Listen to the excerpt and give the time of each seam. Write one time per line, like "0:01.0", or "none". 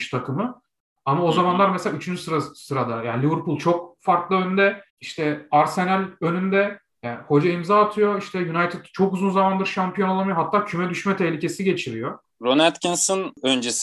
0:04.9